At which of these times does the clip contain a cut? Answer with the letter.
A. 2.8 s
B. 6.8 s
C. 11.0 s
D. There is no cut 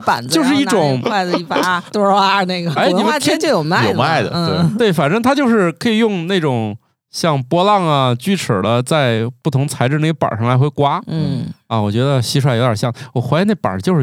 A